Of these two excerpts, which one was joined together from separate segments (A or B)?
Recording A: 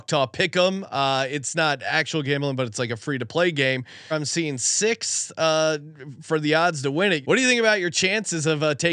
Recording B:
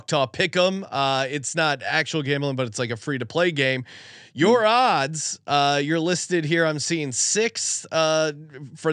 A